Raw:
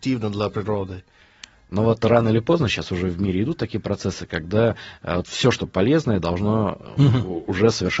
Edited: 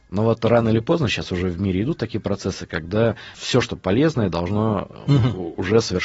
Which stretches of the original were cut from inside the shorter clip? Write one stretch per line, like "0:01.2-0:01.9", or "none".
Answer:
0:04.9-0:05.2